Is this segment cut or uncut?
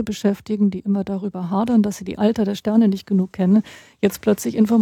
uncut